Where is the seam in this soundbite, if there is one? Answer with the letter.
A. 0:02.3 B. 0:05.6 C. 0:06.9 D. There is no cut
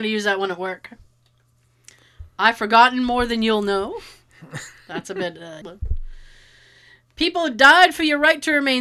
B